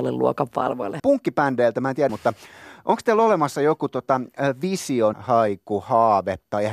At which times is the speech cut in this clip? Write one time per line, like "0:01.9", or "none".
0:01.0
0:02.1
0:05.1